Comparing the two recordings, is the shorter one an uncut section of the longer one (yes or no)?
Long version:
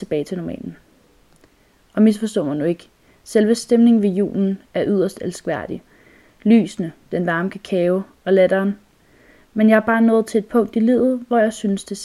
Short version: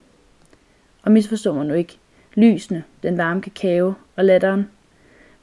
no